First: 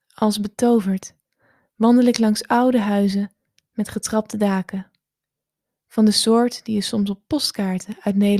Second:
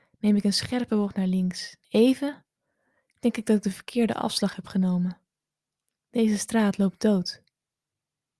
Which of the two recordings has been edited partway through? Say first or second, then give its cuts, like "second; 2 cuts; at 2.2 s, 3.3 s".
second; 1 cut; at 1.8 s